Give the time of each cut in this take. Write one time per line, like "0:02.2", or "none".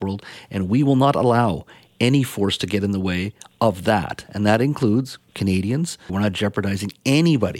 0:06.1